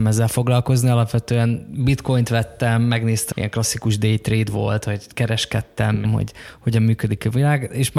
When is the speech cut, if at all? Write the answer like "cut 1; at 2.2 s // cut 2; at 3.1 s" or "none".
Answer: cut 1; at 3.3 s // cut 2; at 6.0 s